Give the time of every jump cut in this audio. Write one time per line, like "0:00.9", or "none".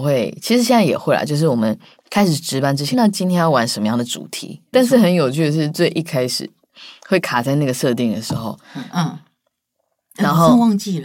0:02.9
0:04.7
0:08.9